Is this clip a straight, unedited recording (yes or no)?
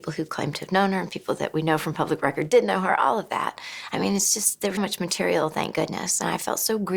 no